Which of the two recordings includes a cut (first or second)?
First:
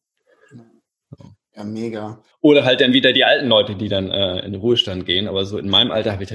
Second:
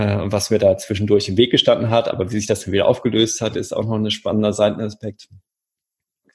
first